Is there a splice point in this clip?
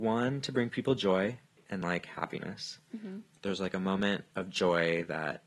no; 0 cuts

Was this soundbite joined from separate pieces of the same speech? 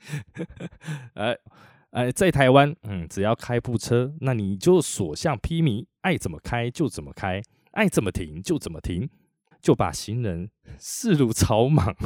yes; 2 cuts; at 1.5 s, 9.5 s

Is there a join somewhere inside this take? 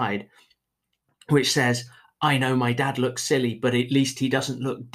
no; 0 cuts

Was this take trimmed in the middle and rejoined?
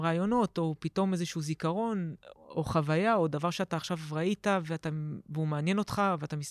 yes; 1 cut; at 2.3 s

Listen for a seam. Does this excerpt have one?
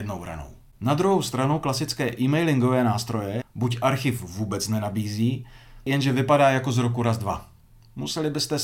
yes; 2 cuts; at 3.4 s, 5.9 s

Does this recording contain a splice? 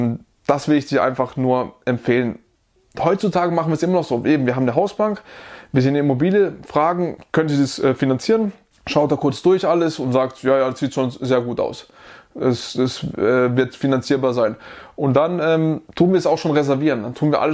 no; 0 cuts

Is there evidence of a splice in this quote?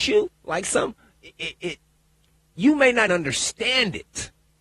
yes; 1 cut; at 3.1 s

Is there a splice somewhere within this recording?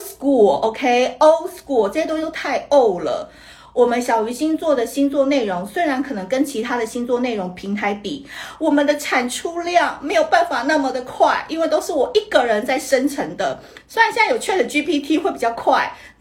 no; 0 cuts

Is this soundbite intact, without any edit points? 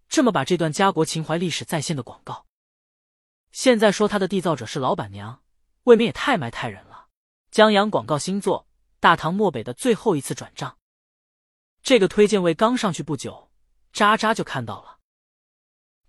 no; 1 cut; at 7.4 s

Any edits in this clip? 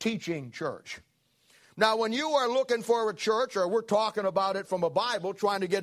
no; 0 cuts

